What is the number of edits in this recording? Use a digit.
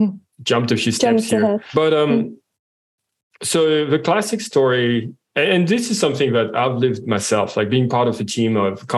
1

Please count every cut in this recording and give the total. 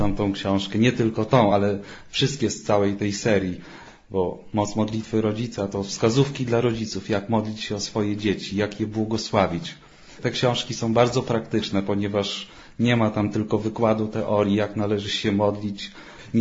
0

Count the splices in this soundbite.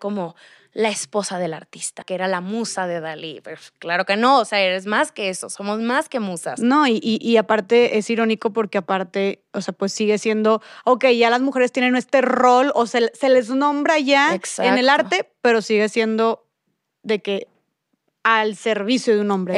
1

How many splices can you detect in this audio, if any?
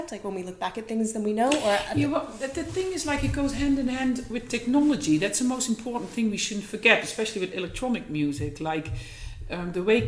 0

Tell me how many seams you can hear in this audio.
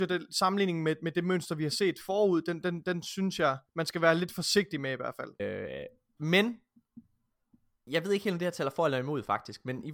3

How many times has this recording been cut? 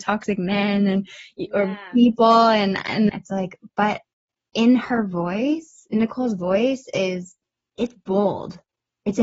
1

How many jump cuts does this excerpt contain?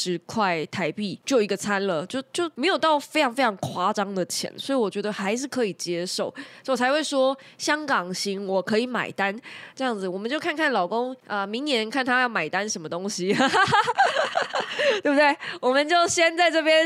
0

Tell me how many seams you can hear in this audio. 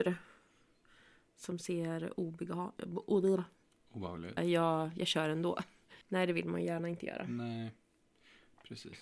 2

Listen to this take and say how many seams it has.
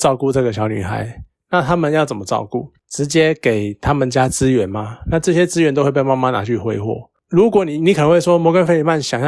0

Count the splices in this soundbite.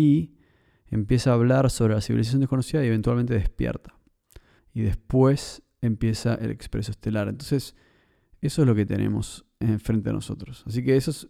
1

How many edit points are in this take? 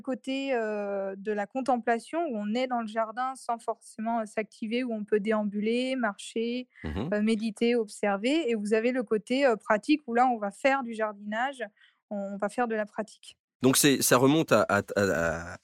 0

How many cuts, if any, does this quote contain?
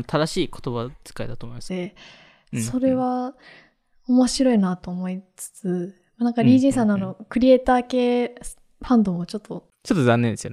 1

